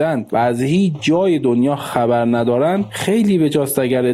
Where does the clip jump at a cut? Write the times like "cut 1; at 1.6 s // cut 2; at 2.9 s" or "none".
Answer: none